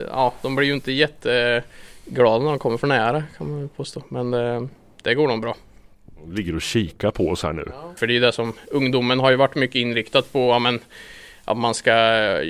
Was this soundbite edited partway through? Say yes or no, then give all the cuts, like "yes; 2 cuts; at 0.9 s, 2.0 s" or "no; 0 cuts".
yes; 1 cut; at 8.0 s